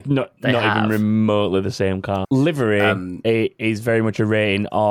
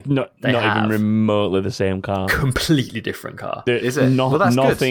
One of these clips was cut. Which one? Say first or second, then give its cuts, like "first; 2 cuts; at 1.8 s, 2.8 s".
first; 1 cut; at 2.2 s